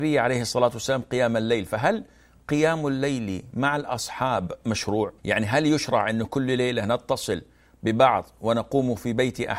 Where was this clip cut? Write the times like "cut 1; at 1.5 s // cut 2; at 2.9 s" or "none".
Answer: cut 1; at 5.2 s